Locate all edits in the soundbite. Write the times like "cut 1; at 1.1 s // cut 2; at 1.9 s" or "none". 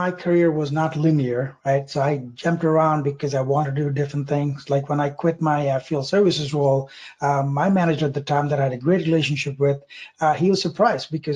none